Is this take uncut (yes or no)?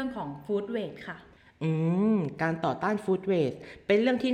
yes